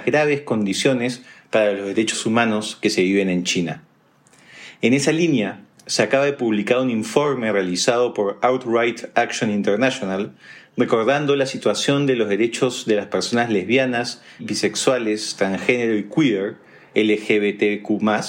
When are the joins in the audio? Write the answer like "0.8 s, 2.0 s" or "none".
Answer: 14.4 s

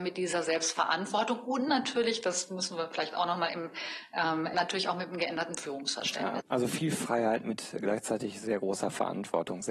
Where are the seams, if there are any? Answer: 4.5 s, 6.4 s

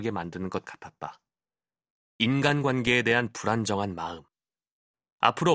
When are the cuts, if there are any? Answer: 2.0 s

